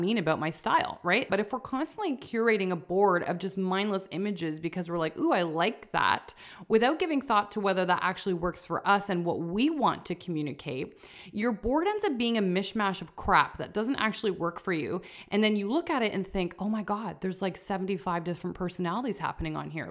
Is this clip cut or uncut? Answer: cut